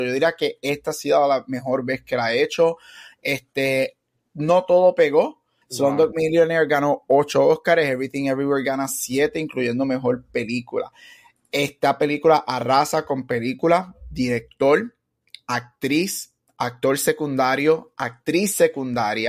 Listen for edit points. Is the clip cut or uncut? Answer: cut